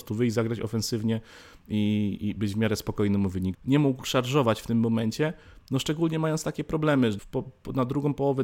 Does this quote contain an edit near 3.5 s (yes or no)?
yes